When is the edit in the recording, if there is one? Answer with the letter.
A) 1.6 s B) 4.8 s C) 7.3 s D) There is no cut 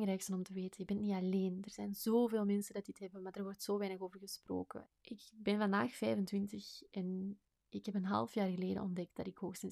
B